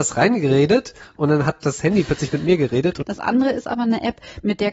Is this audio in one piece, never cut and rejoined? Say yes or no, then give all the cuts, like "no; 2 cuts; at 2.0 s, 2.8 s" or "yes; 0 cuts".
no; 1 cut; at 3.0 s